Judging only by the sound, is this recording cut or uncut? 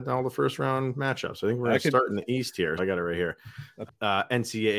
cut